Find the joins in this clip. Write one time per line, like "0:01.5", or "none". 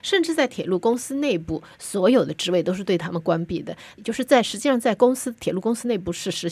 0:04.0